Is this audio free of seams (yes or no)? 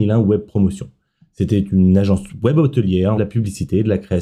no